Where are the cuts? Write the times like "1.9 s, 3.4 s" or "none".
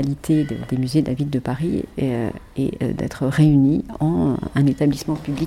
none